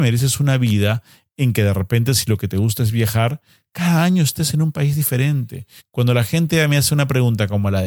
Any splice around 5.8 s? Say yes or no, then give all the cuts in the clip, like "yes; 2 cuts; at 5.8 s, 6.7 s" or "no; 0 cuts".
yes; 1 cut; at 5.8 s